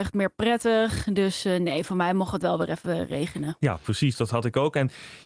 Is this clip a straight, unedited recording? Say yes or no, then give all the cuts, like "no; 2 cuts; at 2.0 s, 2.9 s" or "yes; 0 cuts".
yes; 0 cuts